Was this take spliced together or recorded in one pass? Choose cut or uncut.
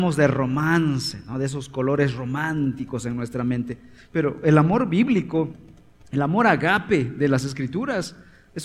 uncut